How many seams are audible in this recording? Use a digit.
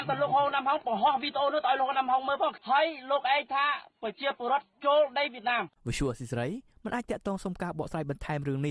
1